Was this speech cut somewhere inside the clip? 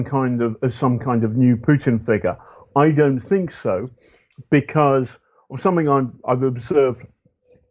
no; 0 cuts

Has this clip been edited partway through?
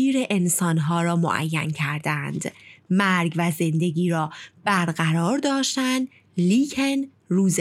no; 0 cuts

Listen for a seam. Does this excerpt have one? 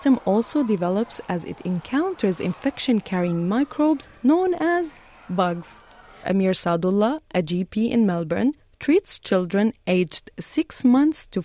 yes; 1 cut; at 6.2 s

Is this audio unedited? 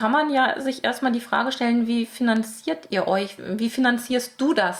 yes; 0 cuts

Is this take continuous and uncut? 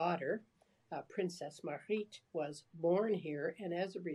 no; 1 cut; at 2.2 s

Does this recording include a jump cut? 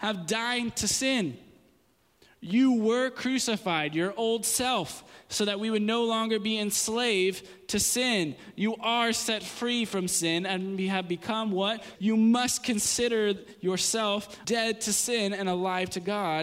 yes; 2 cuts; at 12.0 s, 14.4 s

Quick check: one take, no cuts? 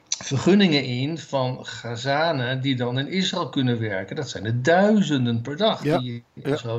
yes; 0 cuts

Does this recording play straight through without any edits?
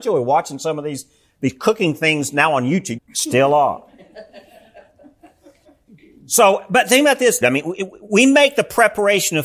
no; 2 cuts; at 3.0 s, 7.4 s

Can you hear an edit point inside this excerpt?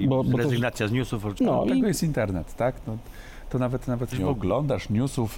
yes; 2 cuts; at 1.4 s, 4.1 s

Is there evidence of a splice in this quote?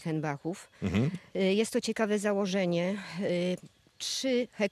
yes; 1 cut; at 1.3 s

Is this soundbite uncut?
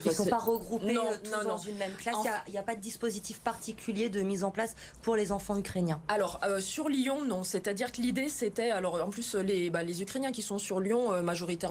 yes; 0 cuts

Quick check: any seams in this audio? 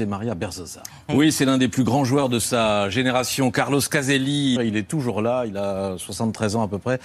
yes; 2 cuts; at 1.1 s, 4.6 s

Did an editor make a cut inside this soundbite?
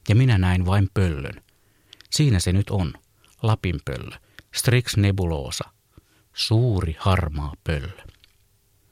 no; 0 cuts

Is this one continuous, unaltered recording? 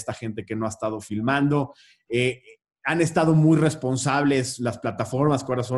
yes; 0 cuts

